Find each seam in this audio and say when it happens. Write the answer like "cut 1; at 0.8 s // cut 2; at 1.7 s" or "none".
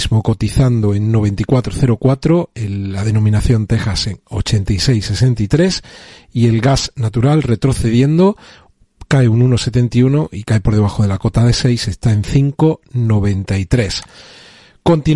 none